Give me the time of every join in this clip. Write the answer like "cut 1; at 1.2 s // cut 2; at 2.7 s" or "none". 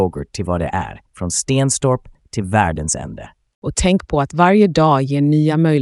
cut 1; at 1.1 s